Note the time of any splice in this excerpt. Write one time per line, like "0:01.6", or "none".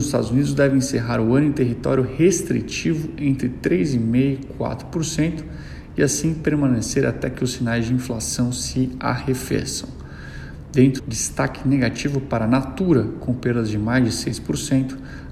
0:11.0